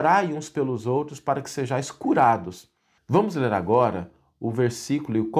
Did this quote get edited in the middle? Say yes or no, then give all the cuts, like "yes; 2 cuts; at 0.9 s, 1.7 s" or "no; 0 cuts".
yes; 1 cut; at 3.0 s